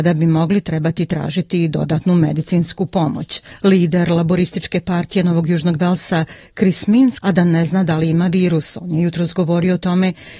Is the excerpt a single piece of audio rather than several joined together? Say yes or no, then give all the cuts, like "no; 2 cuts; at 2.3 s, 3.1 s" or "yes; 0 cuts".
no; 1 cut; at 7.2 s